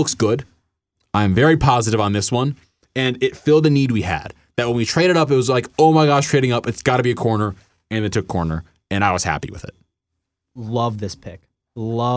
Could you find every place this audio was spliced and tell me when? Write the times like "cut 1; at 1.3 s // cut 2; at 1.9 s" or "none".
none